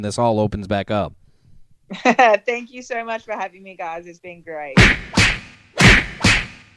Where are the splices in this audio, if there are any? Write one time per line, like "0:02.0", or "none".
none

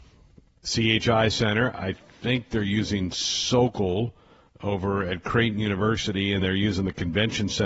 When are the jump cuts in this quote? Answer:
0:06.4

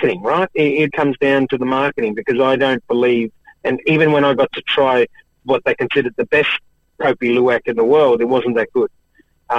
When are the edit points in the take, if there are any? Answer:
0:00.9

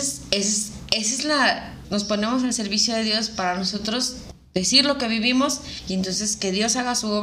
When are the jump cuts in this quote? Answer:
0:01.8

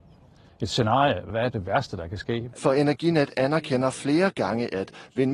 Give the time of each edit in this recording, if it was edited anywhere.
0:01.3
0:02.5

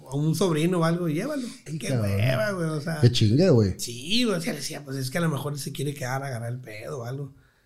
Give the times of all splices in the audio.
0:01.7

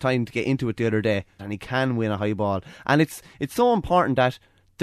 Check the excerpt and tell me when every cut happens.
0:01.4

